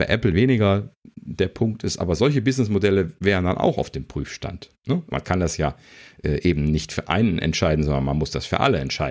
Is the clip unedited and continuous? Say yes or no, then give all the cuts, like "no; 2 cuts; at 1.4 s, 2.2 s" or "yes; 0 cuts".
no; 1 cut; at 5.1 s